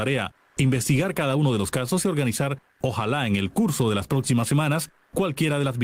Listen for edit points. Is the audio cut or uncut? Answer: uncut